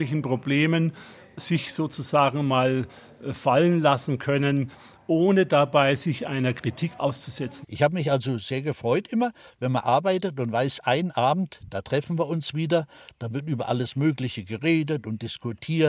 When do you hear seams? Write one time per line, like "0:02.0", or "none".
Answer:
0:07.6

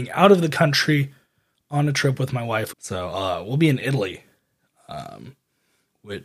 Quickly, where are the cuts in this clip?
0:02.7

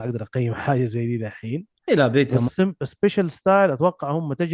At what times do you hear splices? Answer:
0:02.5

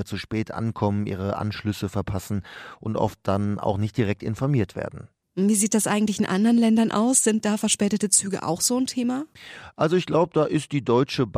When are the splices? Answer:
none

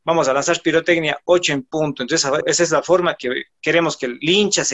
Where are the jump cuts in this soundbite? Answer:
0:02.4

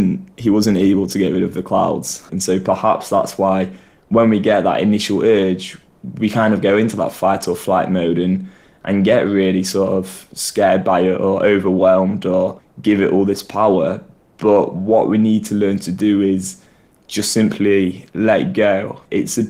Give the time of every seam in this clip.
0:02.3

